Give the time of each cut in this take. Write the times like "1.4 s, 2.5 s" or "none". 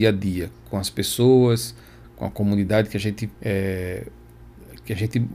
2.0 s, 3.3 s